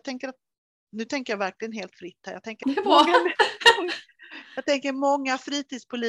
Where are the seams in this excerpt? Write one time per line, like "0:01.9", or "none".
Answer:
0:02.6